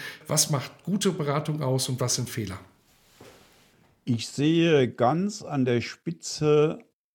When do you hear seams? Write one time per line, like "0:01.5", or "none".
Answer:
none